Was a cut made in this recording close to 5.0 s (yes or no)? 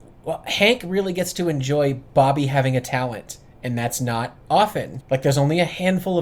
yes